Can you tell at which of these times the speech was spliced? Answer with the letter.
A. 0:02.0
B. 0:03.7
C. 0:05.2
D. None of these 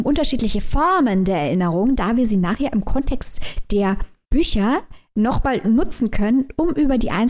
A